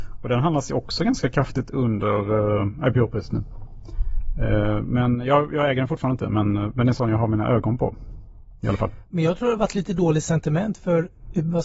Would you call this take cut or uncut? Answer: cut